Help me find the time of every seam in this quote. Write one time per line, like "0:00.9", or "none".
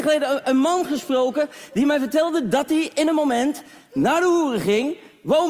none